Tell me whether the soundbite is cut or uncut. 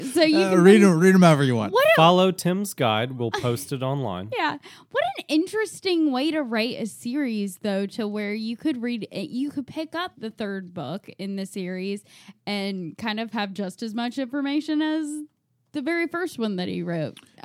uncut